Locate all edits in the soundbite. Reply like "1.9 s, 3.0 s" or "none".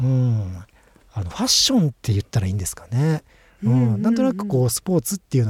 1.9 s